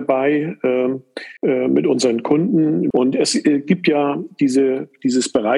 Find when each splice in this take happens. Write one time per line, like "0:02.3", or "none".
0:01.4
0:02.9